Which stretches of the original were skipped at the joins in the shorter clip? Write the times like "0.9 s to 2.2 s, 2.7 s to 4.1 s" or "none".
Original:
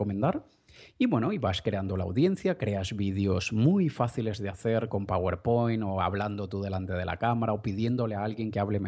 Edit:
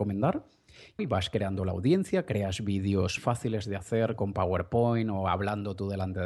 1.0 s to 1.3 s, 3.5 s to 3.9 s